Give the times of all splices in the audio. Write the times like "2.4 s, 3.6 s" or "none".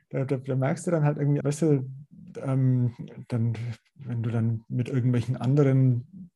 1.4 s